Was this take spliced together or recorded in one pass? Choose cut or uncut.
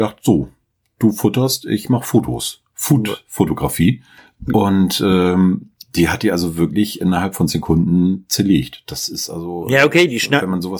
uncut